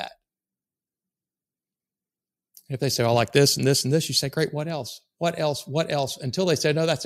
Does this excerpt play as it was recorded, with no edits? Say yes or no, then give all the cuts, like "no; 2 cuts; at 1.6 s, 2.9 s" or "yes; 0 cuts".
yes; 0 cuts